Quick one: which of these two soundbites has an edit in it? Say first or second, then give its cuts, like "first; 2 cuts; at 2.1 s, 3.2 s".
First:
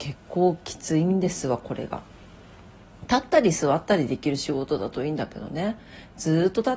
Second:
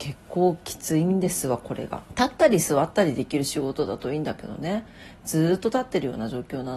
second; 1 cut; at 2.1 s